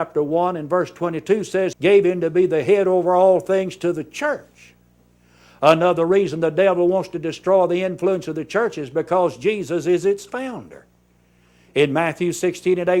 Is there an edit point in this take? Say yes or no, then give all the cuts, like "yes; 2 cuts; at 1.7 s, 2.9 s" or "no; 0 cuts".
yes; 1 cut; at 1.7 s